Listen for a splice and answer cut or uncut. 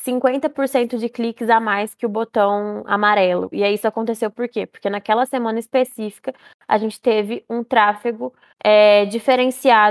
cut